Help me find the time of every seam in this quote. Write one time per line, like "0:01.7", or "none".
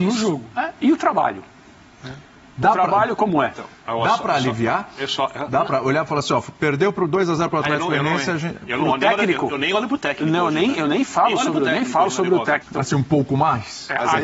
0:12.6